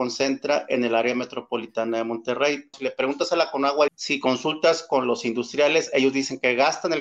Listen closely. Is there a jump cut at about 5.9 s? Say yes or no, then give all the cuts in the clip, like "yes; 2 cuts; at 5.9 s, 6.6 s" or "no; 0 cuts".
no; 2 cuts; at 2.7 s, 3.9 s